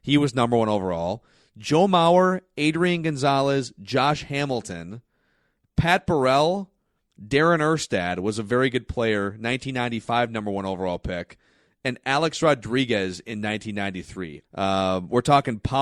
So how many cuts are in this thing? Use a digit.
1